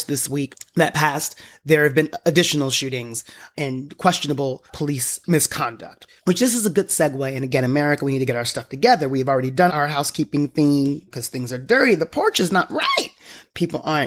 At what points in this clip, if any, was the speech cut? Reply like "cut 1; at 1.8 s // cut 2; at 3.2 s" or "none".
cut 1; at 6.2 s // cut 2; at 9.7 s